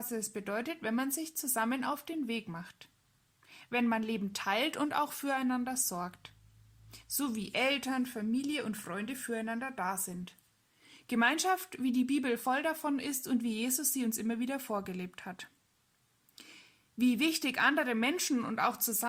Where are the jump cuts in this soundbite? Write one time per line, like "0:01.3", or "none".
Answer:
none